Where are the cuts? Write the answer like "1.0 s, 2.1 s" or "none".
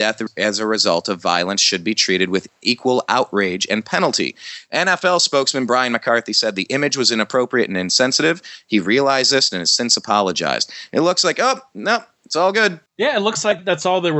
9.5 s, 12.9 s